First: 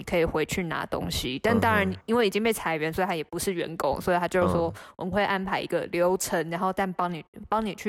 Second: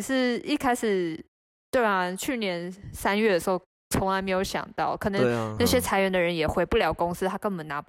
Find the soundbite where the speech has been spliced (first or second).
second